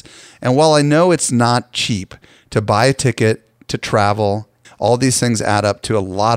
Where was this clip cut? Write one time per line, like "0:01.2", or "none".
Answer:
0:04.6